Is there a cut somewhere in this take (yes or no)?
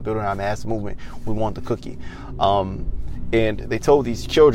no